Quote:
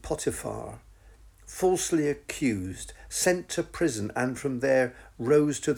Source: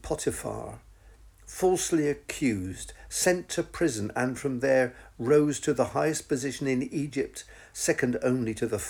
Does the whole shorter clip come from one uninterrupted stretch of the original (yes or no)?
yes